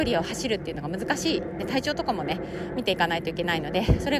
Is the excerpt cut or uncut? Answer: uncut